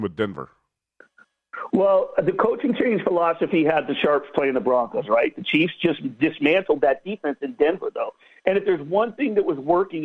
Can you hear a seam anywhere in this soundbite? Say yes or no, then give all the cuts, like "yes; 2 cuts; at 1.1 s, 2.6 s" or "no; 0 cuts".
no; 0 cuts